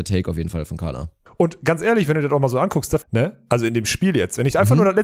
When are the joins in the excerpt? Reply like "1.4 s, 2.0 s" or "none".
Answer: 1.3 s, 3.0 s